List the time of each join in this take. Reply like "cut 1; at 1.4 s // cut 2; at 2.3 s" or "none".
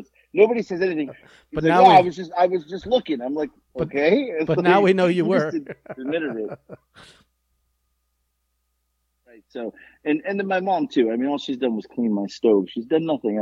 cut 1; at 1.1 s

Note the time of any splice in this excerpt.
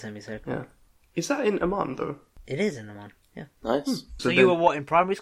cut 1; at 4.2 s

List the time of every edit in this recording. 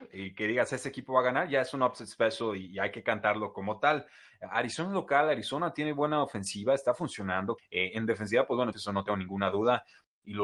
cut 1; at 7.6 s // cut 2; at 8.7 s

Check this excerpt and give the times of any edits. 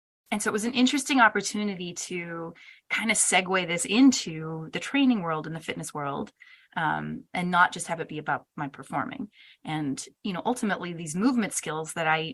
none

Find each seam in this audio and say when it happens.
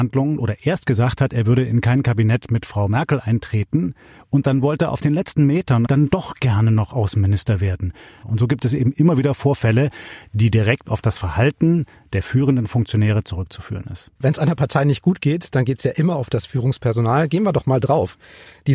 cut 1; at 5.9 s // cut 2; at 8.2 s // cut 3; at 14.2 s

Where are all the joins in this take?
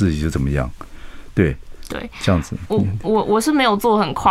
cut 1; at 2.7 s

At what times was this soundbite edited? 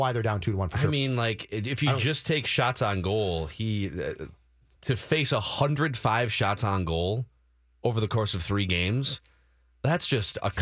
cut 1; at 4.8 s

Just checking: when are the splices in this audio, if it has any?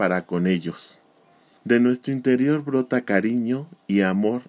cut 1; at 1.6 s

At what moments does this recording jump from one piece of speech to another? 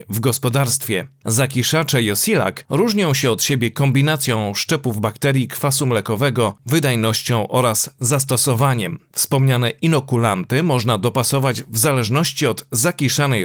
cut 1; at 6.6 s

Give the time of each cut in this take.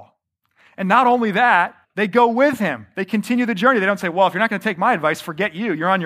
cut 1; at 1.8 s

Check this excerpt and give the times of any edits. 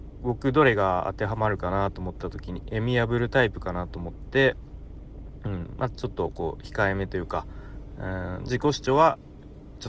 none

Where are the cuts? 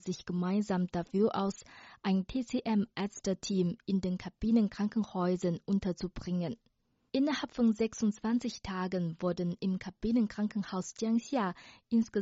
cut 1; at 7.1 s

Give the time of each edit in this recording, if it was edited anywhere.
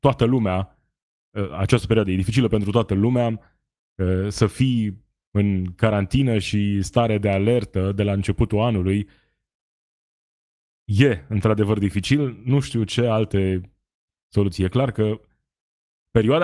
none

